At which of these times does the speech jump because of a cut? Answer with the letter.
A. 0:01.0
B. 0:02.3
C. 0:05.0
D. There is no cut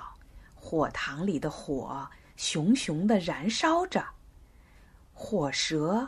D